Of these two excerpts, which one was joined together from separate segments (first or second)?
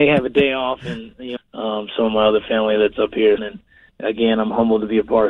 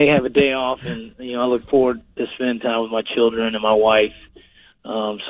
first